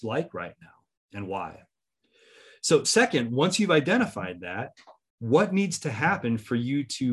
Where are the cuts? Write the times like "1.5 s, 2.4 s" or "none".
none